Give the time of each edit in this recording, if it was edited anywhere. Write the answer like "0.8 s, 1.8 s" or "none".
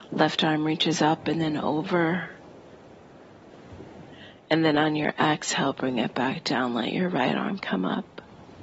none